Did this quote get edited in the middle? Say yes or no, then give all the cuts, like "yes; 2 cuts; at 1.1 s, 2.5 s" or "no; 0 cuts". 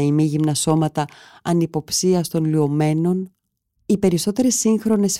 yes; 1 cut; at 3.8 s